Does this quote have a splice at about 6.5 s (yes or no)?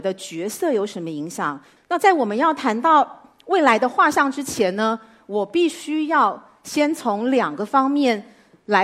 no